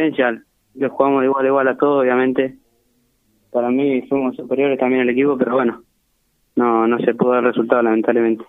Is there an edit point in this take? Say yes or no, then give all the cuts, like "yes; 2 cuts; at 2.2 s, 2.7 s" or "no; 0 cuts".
no; 0 cuts